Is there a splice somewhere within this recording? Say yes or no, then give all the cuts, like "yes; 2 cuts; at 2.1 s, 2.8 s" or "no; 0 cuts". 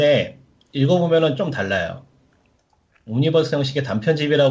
no; 0 cuts